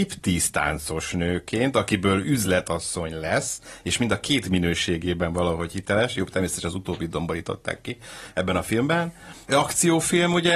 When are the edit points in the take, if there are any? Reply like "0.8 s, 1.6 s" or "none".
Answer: none